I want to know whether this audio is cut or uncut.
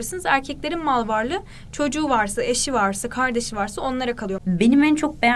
cut